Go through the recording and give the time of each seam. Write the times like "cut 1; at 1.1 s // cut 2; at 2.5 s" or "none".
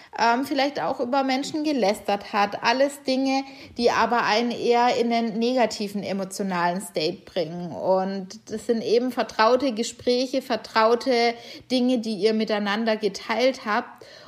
none

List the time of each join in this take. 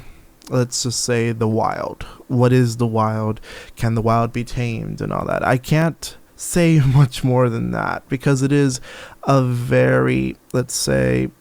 cut 1; at 6.3 s

